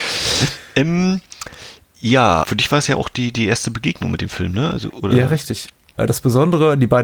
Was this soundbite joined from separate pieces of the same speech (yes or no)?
yes